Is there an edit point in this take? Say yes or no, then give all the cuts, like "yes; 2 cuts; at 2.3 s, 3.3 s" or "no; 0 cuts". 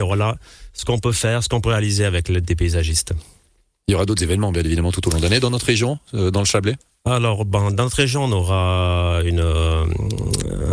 no; 0 cuts